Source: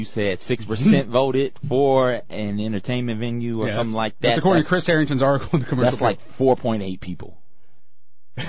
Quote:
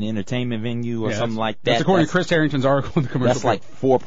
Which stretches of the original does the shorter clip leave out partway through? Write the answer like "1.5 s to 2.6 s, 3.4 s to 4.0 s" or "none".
none